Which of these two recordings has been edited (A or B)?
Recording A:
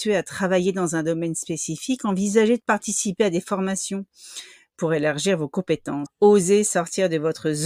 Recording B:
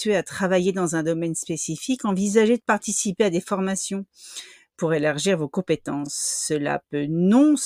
A